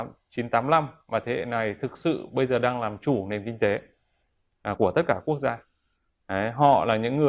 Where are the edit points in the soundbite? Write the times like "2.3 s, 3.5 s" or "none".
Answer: none